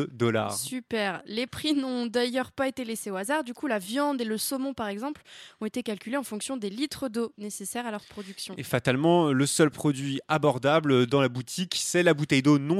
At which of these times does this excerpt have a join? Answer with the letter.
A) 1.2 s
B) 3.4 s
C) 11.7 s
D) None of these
D